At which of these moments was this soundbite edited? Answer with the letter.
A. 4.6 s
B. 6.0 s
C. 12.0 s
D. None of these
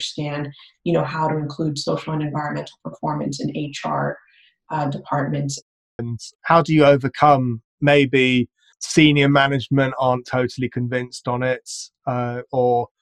B